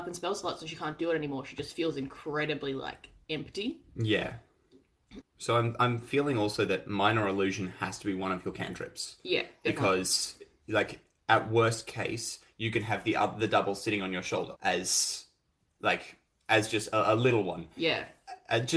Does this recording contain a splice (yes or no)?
yes